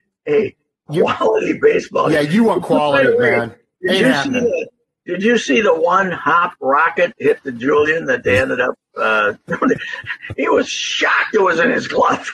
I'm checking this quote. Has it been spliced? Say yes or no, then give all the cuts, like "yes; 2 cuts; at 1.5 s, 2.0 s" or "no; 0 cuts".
no; 0 cuts